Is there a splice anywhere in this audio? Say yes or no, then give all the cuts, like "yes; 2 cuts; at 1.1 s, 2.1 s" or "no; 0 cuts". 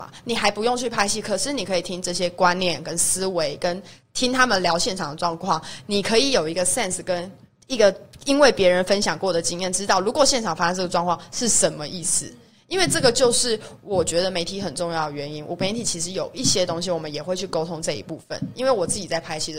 no; 0 cuts